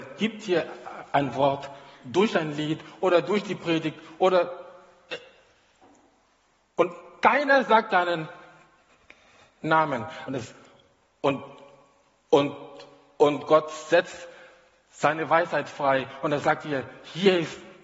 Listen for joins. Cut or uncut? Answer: cut